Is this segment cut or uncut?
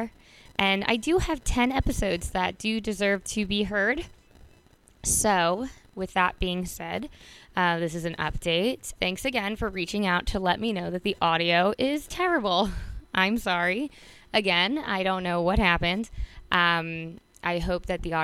cut